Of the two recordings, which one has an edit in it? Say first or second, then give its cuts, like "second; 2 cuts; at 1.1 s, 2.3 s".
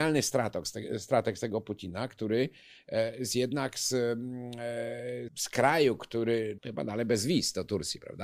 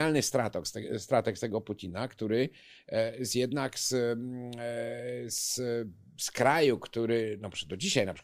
first; 2 cuts; at 5.3 s, 6.6 s